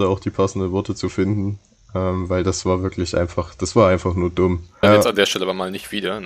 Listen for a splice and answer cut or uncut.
cut